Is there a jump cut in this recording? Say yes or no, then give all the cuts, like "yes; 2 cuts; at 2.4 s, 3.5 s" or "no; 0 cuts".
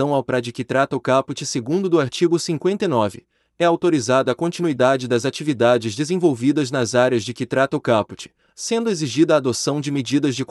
yes; 1 cut; at 8.5 s